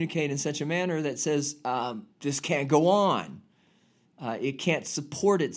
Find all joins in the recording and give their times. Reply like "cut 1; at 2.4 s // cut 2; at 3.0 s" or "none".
cut 1; at 2.1 s